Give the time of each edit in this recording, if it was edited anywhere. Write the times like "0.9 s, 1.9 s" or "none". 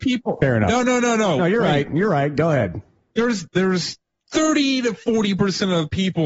3.5 s